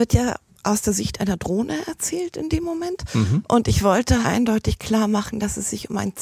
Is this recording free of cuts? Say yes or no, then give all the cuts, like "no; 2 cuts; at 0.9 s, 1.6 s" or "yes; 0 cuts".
no; 1 cut; at 4.2 s